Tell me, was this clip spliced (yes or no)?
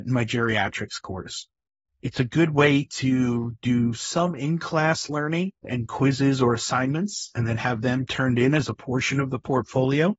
no